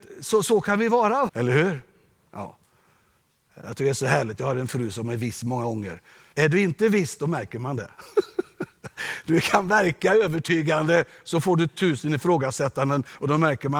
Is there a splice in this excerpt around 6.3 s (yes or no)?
yes